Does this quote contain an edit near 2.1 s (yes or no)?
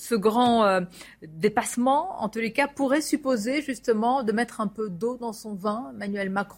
no